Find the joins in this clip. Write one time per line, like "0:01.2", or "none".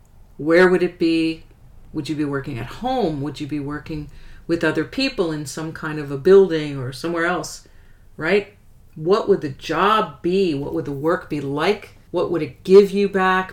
0:12.1